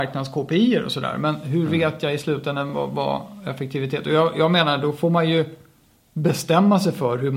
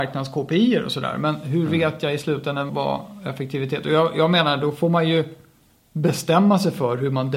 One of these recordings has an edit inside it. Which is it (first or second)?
second